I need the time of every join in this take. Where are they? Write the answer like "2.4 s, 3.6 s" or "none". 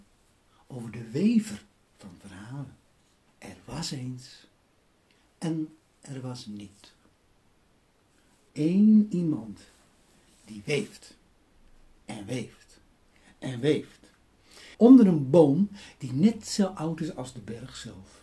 3.3 s, 8.5 s, 14.7 s